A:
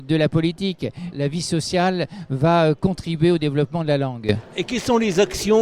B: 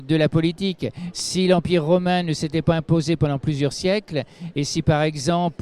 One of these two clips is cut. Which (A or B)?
A